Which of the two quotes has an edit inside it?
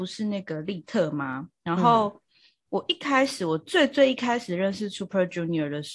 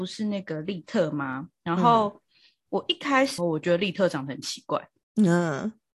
second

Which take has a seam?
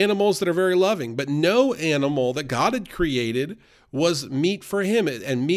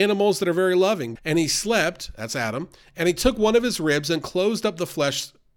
second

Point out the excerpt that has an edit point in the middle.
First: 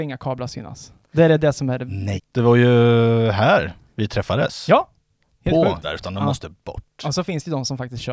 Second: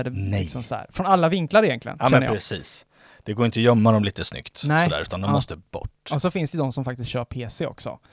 first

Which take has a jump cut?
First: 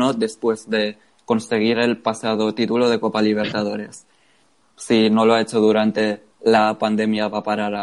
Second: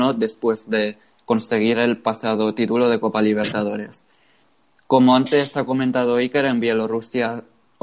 first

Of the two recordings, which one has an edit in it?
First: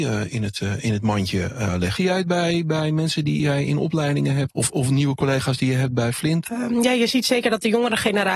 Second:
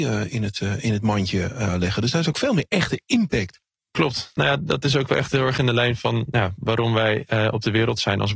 first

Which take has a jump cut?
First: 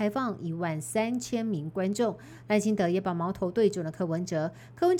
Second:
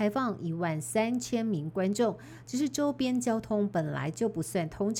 first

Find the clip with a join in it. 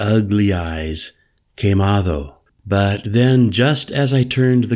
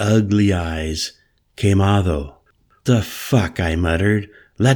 first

